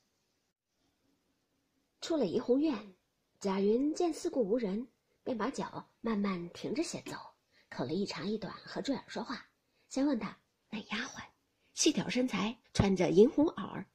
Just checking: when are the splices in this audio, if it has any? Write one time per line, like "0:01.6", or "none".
0:10.6
0:12.6